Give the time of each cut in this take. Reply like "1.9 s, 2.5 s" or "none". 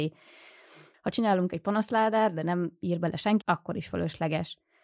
0.9 s, 3.4 s